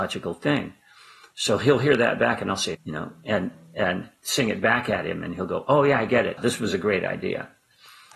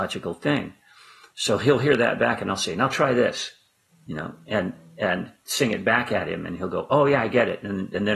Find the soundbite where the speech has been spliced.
first; 2 cuts; at 2.7 s, 6.4 s

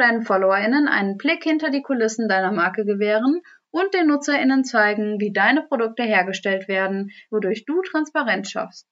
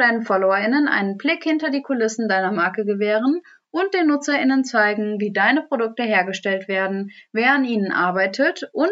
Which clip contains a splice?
first; 1 cut; at 7.3 s

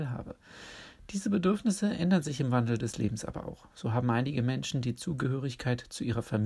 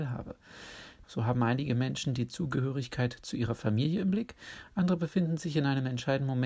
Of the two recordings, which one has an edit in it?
second; 1 cut; at 1.0 s

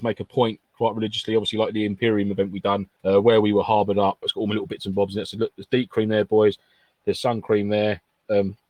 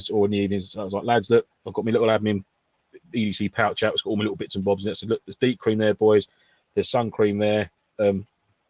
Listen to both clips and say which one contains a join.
first; 2 cuts; at 3.0 s, 4.2 s

